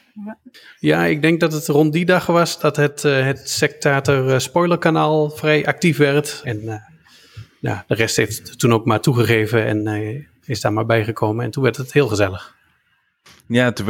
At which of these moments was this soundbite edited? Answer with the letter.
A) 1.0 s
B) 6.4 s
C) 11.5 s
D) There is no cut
B